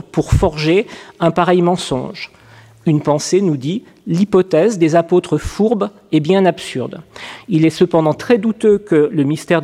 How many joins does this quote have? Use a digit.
0